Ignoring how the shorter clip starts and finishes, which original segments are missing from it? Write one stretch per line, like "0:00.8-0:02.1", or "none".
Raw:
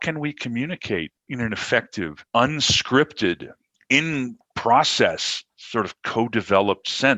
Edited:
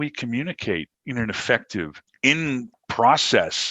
0:02.3-0:03.7